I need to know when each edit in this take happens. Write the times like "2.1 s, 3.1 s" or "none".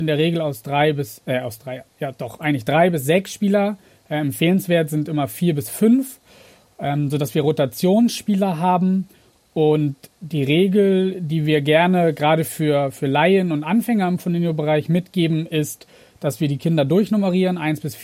none